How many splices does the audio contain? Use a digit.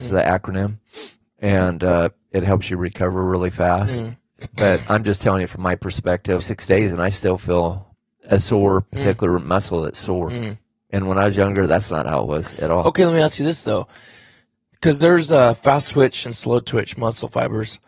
1